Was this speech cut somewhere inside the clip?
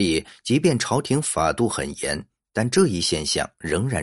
no; 0 cuts

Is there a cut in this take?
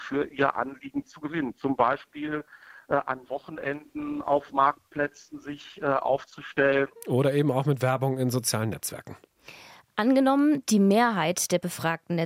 no; 0 cuts

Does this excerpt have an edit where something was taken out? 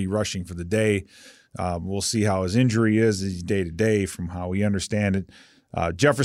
no; 0 cuts

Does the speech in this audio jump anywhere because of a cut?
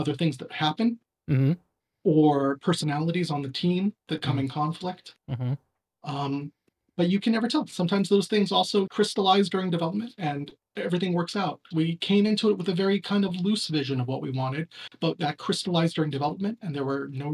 yes; 2 cuts; at 8.9 s, 11.7 s

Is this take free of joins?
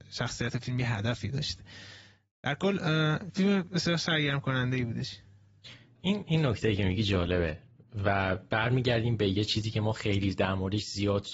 yes; 0 cuts

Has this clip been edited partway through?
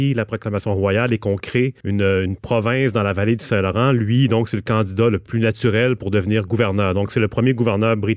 no; 0 cuts

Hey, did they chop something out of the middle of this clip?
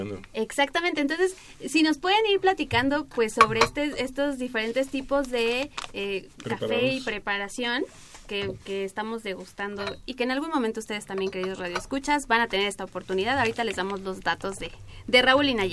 no; 0 cuts

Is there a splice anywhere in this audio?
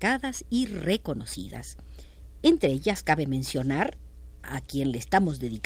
no; 0 cuts

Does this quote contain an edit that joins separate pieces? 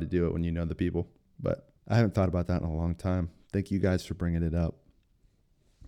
yes; 1 cut; at 1.8 s

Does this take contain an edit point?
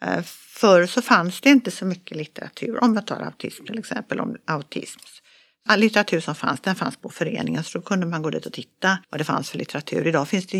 yes; 2 cuts; at 5.7 s, 9.0 s

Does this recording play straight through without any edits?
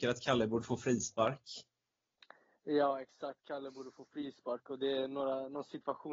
yes; 0 cuts

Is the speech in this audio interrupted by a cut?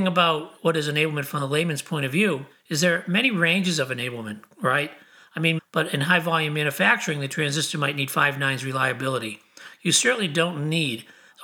yes; 1 cut; at 5.6 s

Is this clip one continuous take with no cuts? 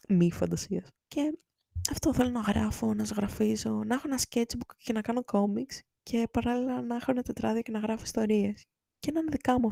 no; 1 cut; at 1.0 s

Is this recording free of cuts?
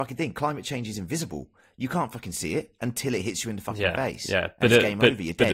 yes; 0 cuts

